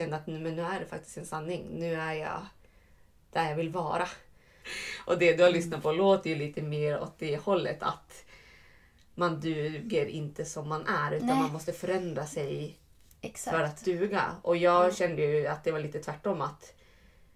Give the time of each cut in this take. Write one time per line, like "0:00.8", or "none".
0:04.6

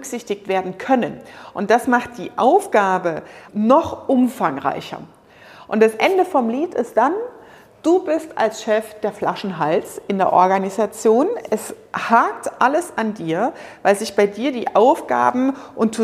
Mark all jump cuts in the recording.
0:03.5

